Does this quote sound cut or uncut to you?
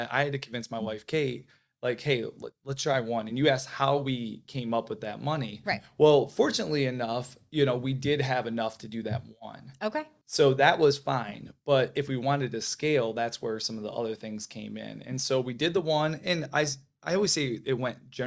uncut